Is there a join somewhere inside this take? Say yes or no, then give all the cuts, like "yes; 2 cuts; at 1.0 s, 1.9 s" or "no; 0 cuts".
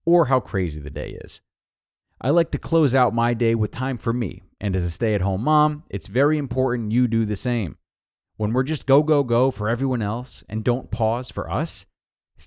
no; 0 cuts